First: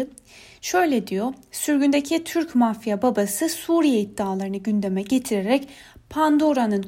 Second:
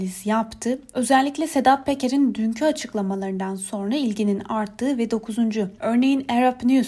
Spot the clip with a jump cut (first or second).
second